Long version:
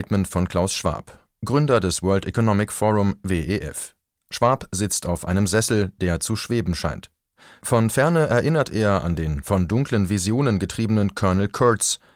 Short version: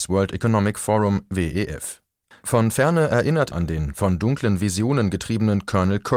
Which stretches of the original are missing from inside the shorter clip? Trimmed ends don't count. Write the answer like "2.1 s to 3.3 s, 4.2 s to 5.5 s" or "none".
4.2 s to 7.5 s, 8.7 s to 9.0 s